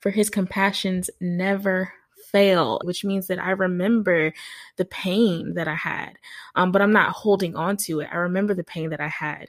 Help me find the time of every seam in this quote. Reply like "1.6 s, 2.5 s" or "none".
2.8 s